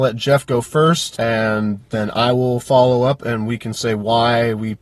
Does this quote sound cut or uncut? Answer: uncut